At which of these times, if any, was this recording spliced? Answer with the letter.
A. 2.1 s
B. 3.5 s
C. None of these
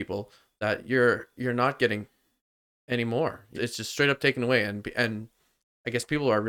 B